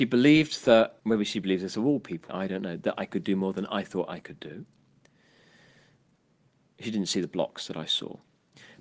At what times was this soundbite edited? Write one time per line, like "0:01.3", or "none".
0:01.0
0:02.3